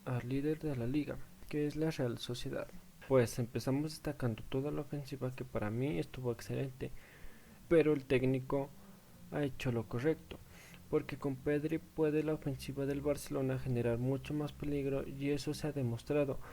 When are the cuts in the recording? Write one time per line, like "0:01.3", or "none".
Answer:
0:07.6